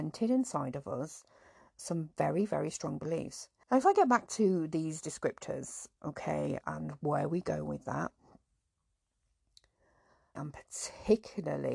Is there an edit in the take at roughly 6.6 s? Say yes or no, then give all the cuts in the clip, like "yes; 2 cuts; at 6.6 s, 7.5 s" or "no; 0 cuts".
yes; 3 cuts; at 3.6 s, 6.6 s, 10.4 s